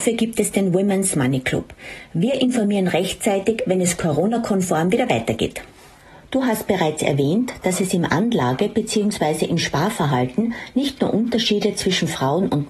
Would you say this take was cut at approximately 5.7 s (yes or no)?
no